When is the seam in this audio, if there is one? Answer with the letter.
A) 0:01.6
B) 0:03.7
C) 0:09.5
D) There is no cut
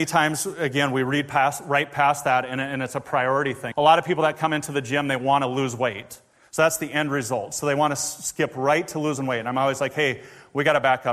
B